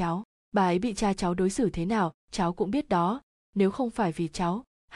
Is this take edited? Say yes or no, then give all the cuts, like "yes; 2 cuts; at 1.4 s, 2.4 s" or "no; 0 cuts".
no; 0 cuts